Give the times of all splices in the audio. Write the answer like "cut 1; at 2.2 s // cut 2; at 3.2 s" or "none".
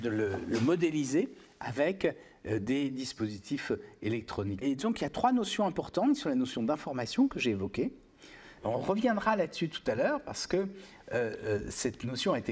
cut 1; at 4.6 s // cut 2; at 8.6 s